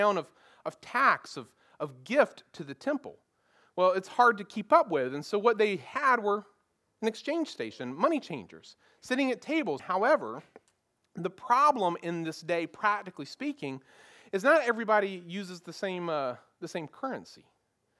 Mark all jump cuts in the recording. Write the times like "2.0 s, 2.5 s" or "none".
9.8 s